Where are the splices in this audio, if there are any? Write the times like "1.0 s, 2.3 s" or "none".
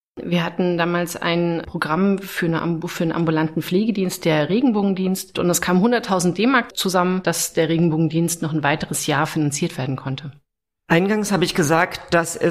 5.4 s, 7.2 s